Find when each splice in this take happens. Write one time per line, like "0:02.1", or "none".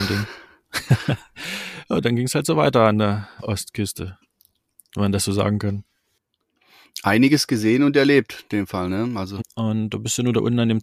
0:03.4
0:09.4